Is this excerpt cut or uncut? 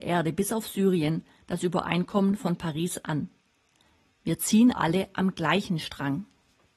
cut